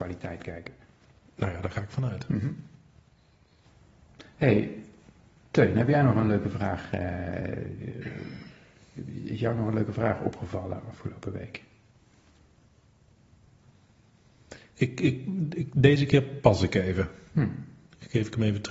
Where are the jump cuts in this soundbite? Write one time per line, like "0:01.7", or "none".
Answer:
none